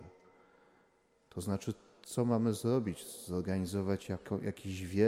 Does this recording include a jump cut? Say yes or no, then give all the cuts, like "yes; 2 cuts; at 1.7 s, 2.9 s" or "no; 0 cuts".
no; 0 cuts